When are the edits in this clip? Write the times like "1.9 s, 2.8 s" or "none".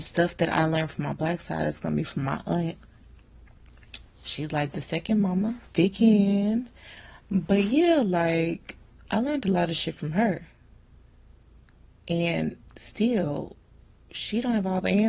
5.7 s